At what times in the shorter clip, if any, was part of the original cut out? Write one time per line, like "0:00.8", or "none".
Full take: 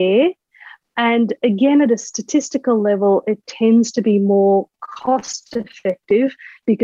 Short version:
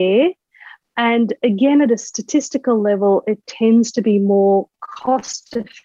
none